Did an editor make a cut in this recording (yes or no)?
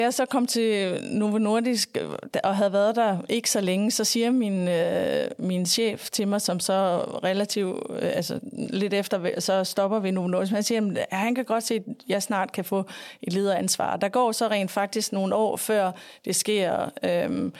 no